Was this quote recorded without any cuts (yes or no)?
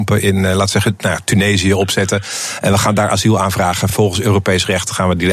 yes